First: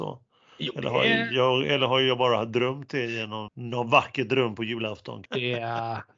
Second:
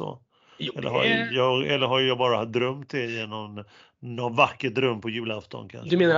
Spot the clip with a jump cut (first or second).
first